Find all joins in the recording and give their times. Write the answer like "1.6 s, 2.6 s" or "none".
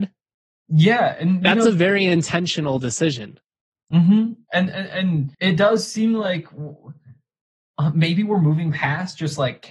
5.3 s